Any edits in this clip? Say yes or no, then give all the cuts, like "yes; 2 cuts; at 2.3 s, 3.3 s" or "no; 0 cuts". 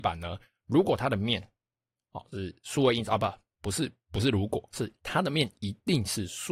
no; 0 cuts